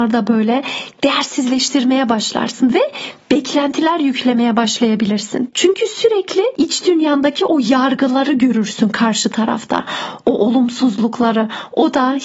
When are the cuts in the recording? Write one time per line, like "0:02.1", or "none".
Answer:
0:05.5